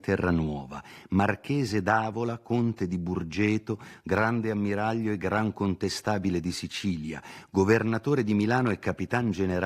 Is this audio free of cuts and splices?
yes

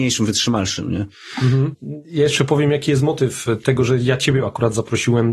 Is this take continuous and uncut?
yes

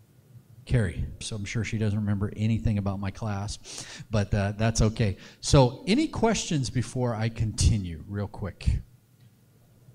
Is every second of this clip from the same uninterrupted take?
no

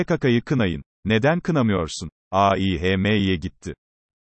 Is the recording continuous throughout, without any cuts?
no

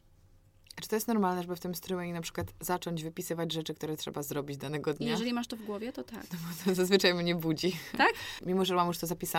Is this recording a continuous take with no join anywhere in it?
no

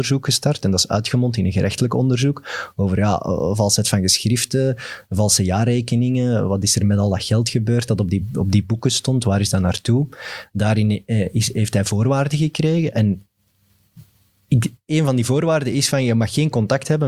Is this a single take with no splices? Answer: yes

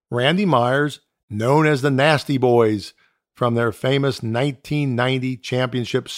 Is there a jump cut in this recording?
yes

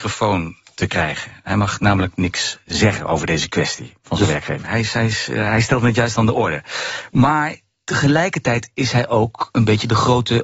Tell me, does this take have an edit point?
yes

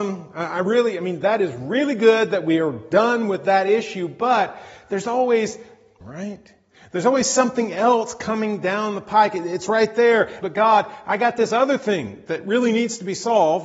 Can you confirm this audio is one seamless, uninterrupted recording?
no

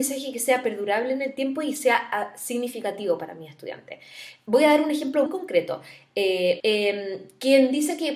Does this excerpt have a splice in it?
yes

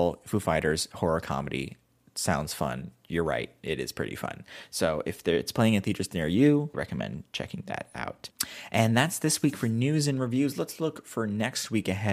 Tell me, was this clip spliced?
no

